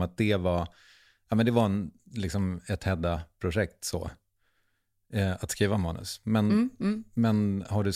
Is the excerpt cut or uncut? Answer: uncut